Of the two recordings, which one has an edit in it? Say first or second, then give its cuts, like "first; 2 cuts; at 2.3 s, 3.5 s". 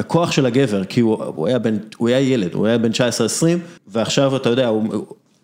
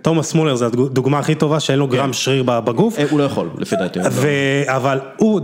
first; 1 cut; at 3.8 s